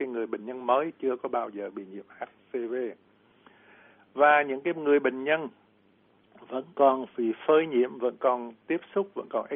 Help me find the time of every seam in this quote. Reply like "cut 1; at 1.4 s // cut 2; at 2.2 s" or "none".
none